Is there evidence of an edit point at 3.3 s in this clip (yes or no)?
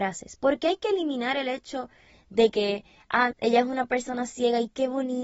yes